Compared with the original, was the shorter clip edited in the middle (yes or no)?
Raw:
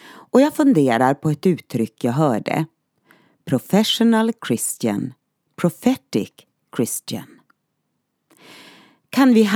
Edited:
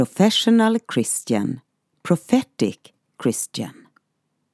no